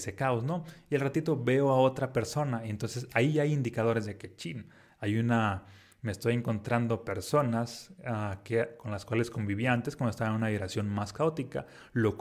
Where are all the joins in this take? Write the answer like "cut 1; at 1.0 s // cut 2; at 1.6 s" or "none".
none

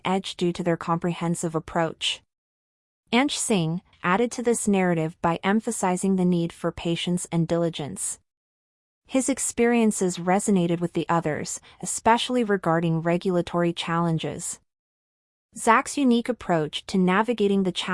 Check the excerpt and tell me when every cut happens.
cut 1; at 3.9 s

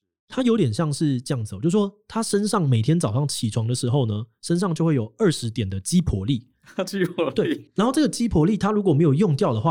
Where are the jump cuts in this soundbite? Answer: none

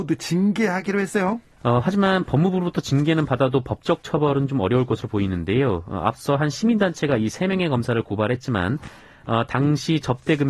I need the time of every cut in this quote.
cut 1; at 1.5 s

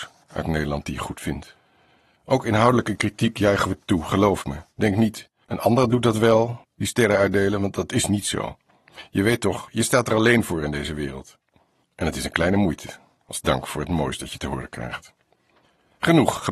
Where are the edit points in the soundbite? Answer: none

